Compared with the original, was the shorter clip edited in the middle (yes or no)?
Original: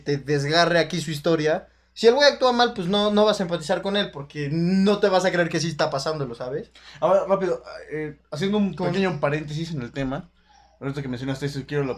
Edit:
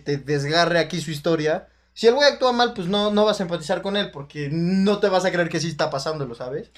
no